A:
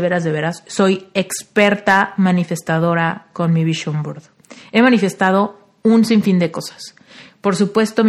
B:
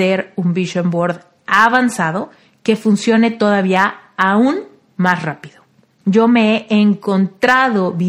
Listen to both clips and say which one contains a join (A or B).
B